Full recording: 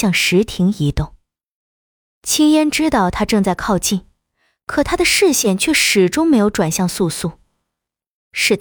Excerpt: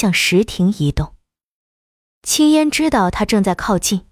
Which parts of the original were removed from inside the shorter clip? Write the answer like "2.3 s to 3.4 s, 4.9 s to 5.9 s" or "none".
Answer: none